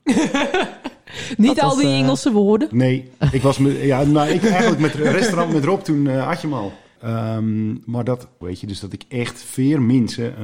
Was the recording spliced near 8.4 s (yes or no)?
yes